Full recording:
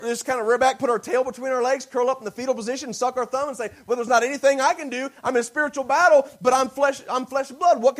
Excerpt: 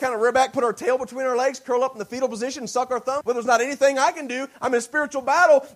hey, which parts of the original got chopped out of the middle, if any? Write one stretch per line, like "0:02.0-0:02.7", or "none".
0:03.5-0:03.8